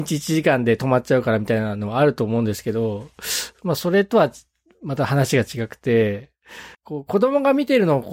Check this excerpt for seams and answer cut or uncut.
cut